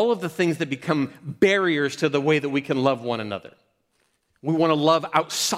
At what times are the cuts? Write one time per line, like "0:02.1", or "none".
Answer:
none